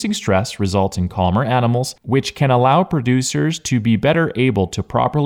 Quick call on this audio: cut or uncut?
uncut